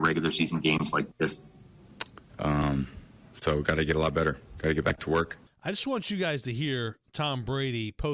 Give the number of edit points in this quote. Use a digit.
2